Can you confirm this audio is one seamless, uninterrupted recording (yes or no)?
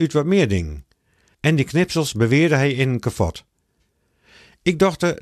no